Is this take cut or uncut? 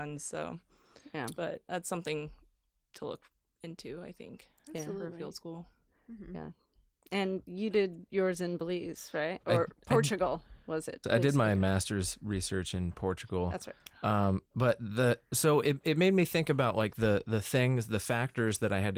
cut